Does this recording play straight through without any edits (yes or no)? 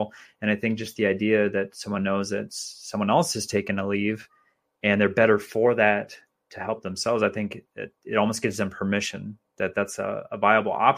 yes